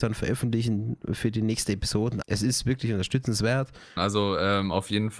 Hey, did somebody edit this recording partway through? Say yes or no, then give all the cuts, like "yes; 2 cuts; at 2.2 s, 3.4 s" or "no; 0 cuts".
yes; 2 cuts; at 2.2 s, 4.0 s